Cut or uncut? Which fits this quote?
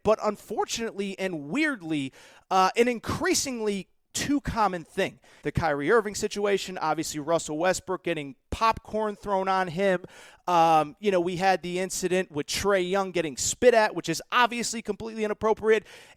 cut